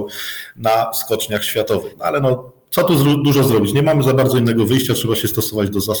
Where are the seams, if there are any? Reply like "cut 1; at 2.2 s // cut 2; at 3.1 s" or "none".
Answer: none